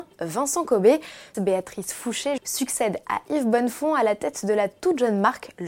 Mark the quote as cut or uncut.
cut